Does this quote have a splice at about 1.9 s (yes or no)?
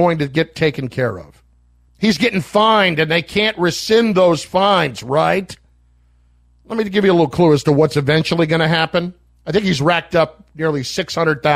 yes